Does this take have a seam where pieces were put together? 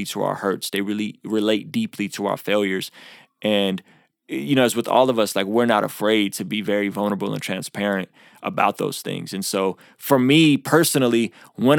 no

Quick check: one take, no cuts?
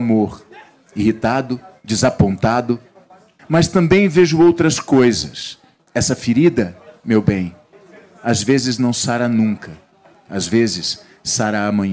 no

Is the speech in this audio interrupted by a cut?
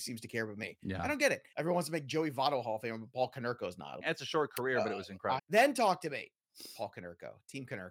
yes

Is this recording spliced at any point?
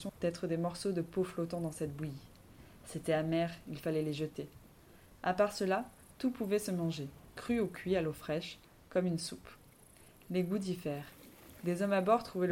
no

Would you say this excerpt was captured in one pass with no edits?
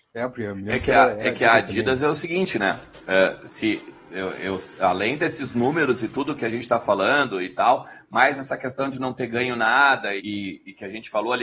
no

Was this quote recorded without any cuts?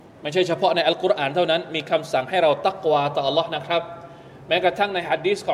yes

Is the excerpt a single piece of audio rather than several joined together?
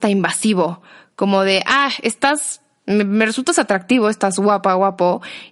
yes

